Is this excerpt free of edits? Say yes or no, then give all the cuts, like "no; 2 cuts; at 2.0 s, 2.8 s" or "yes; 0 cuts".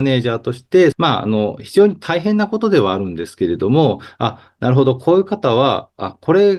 no; 1 cut; at 0.9 s